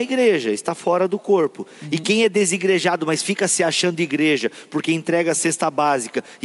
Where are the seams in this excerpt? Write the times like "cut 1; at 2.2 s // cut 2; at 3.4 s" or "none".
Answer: none